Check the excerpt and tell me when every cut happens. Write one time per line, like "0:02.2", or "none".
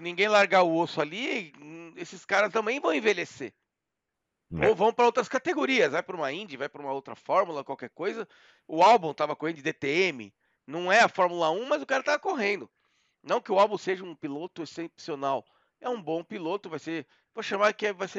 none